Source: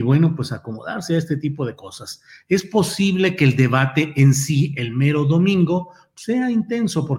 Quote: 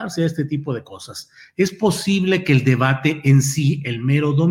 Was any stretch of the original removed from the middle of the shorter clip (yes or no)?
no